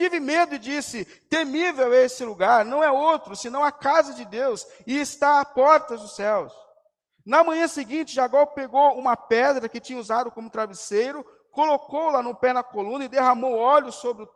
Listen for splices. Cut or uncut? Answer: uncut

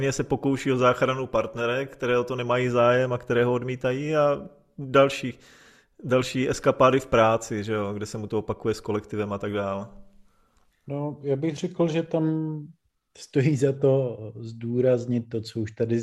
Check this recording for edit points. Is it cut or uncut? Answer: cut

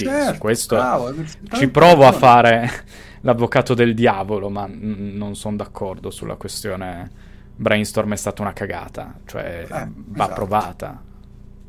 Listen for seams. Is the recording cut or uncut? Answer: uncut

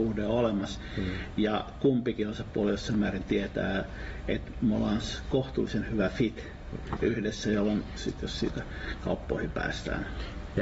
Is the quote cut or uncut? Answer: cut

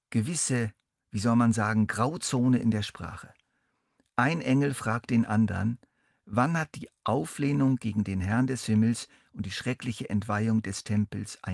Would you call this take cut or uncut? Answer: uncut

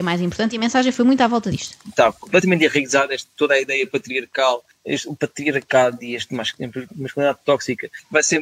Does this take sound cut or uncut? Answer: cut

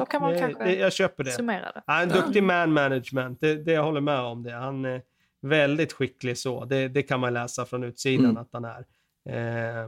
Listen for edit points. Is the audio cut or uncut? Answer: uncut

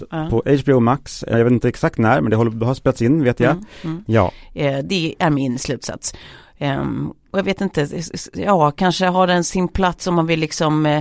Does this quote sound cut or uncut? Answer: cut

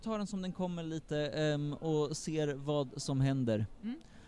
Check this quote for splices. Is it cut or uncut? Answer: uncut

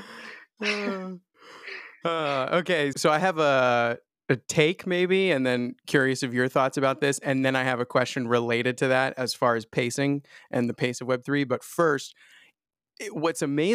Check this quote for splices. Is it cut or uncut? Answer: cut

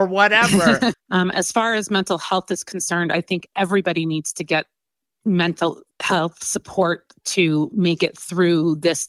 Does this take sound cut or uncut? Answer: cut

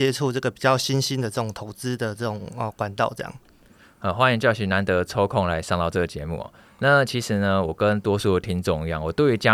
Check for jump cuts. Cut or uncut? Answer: uncut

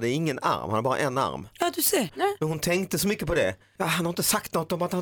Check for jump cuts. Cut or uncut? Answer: cut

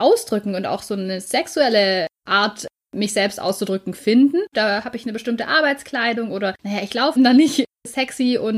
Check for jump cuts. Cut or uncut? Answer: cut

